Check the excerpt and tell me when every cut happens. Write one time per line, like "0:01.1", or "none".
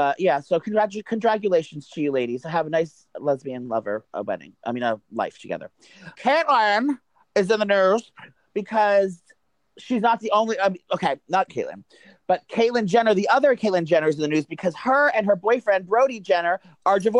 0:06.1
0:11.5